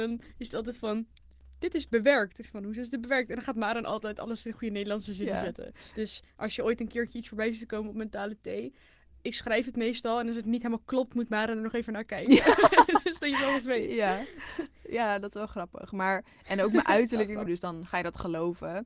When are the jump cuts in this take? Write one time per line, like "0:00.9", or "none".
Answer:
0:17.5